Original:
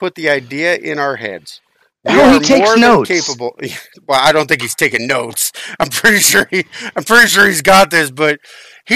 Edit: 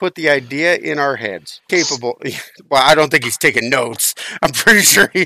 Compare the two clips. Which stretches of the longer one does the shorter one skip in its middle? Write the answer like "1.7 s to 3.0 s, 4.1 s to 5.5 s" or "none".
1.7 s to 3.1 s